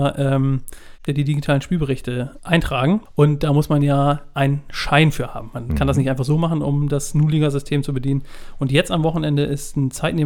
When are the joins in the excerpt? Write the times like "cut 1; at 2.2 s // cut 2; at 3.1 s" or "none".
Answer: cut 1; at 1.1 s